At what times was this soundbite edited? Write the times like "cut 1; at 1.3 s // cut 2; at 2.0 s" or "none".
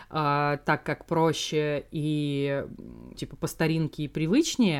cut 1; at 3.1 s